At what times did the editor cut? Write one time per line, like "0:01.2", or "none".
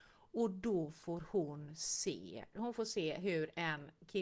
0:02.5